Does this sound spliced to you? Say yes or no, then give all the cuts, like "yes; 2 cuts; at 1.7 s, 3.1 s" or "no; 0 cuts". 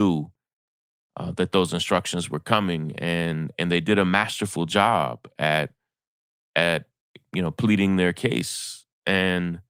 no; 0 cuts